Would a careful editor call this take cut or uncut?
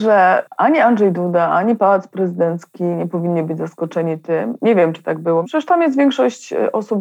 cut